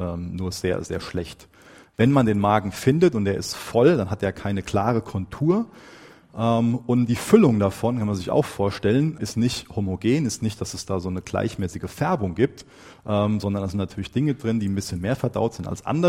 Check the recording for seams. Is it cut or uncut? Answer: cut